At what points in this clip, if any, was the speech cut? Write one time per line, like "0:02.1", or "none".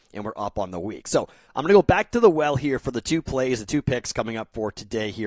none